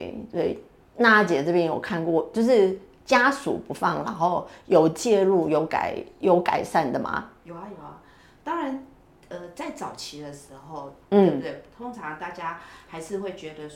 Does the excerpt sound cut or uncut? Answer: cut